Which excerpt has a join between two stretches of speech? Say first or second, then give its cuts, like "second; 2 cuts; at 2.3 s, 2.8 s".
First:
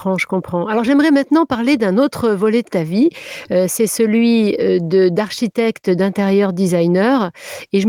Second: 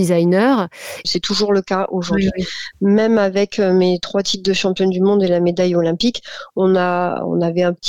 second; 1 cut; at 1.0 s